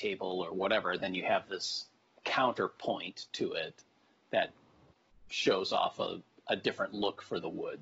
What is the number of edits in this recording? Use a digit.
0